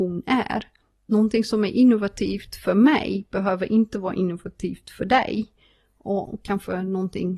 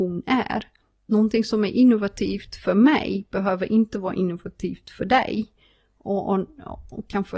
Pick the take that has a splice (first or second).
first